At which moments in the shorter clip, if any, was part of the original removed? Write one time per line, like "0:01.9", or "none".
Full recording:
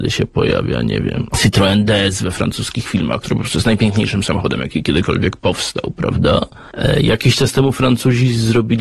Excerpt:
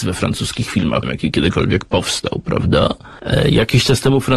0:01.0